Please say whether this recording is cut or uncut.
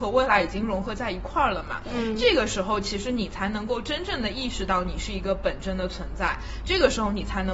uncut